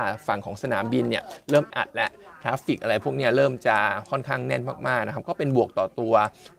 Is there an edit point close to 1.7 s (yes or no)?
yes